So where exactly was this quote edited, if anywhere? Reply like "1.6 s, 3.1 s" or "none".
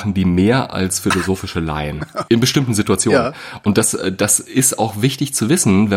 2.3 s